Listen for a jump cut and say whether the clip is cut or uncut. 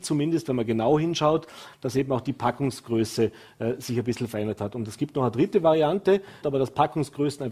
cut